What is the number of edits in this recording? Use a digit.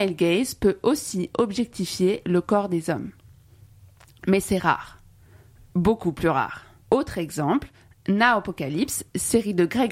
1